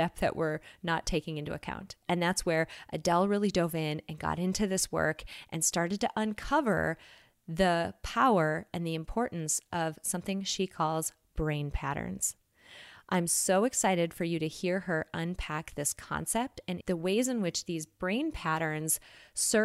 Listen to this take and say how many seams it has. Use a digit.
1